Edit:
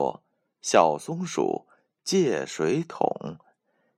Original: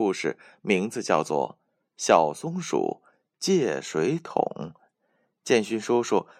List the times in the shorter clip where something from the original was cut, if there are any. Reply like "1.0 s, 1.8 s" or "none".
none

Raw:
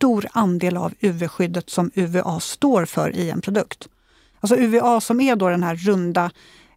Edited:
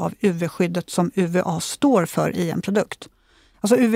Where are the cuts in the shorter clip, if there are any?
none

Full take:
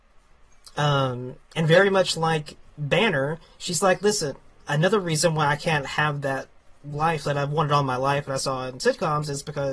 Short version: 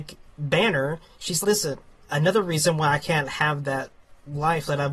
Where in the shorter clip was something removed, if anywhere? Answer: 1.4 s

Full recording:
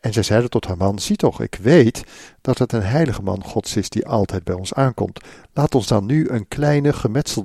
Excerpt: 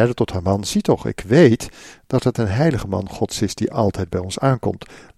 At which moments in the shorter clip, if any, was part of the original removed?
none

